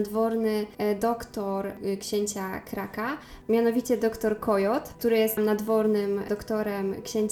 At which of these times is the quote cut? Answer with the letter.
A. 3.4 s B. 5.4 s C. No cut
B